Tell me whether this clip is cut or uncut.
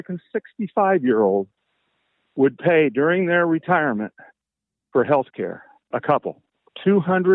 cut